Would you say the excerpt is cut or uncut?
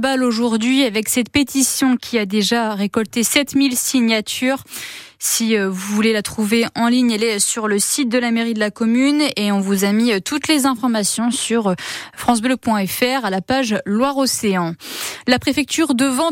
uncut